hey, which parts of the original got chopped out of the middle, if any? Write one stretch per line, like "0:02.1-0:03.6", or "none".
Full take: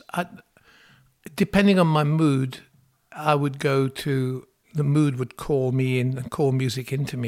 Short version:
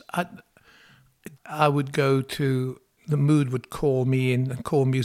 0:01.3-0:03.0